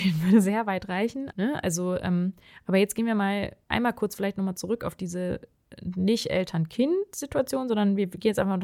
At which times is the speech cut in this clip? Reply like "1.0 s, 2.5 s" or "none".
1.3 s